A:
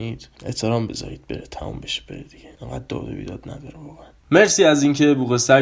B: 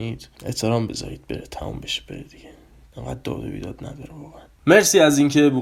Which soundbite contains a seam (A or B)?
A